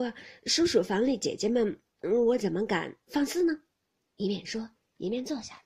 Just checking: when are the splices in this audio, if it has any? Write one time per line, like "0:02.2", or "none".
none